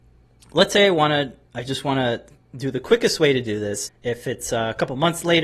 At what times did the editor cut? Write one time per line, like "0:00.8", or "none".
0:03.9

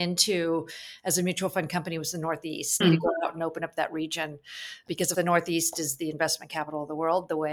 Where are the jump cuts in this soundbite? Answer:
0:02.8
0:05.1

